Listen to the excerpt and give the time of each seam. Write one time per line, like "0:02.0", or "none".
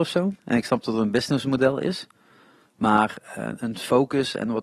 0:03.6